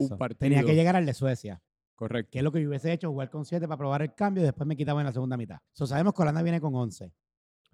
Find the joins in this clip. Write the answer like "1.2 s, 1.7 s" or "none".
5.7 s

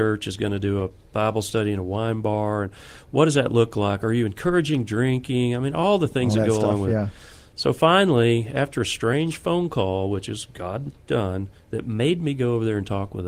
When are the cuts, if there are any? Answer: none

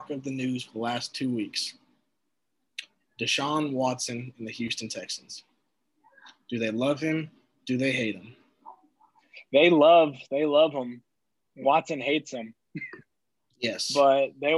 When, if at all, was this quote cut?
none

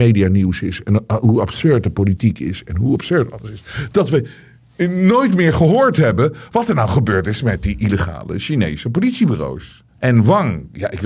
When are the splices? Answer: 9.9 s

